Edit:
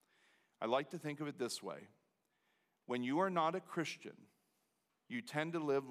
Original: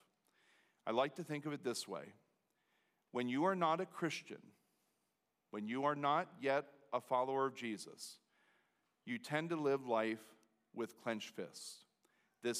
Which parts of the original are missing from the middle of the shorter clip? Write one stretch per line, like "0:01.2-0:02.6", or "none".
0:05.2-0:08.9